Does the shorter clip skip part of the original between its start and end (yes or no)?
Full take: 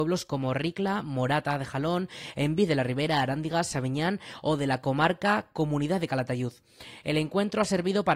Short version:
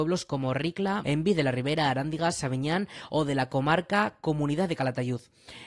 yes